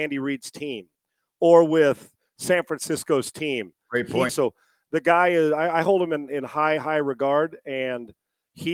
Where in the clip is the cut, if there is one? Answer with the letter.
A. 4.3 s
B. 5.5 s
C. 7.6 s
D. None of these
A